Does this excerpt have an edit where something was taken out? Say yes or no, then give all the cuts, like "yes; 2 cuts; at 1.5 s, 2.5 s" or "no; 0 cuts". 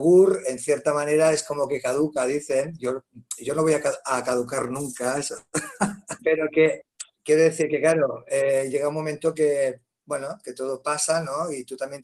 yes; 1 cut; at 6.2 s